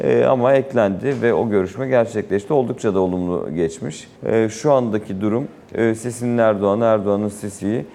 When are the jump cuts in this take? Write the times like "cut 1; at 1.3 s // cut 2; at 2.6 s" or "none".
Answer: cut 1; at 4.2 s